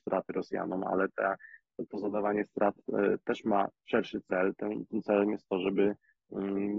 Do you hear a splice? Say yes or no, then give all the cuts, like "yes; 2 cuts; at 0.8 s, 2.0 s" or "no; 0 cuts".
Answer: yes; 1 cut; at 3.7 s